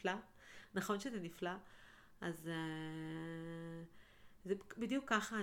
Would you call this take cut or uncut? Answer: uncut